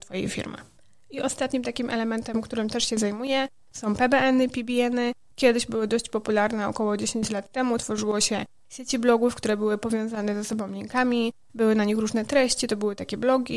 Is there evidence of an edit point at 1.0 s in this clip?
no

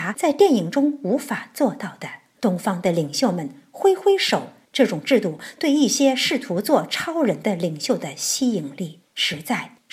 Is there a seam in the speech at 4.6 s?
yes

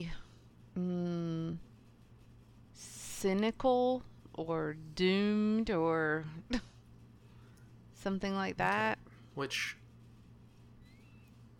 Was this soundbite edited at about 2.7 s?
yes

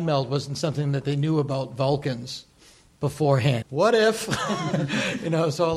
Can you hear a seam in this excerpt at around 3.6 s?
yes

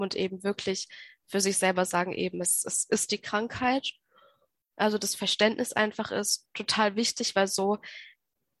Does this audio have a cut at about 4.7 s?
yes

